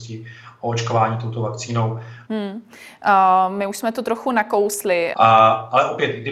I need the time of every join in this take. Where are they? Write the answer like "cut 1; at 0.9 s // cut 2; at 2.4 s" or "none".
cut 1; at 2.3 s // cut 2; at 5.1 s